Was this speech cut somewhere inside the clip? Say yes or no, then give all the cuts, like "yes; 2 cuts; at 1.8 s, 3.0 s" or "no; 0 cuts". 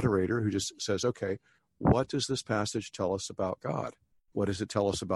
no; 0 cuts